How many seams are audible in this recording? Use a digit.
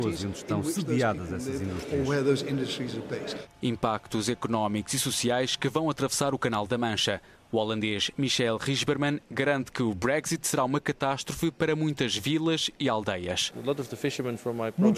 1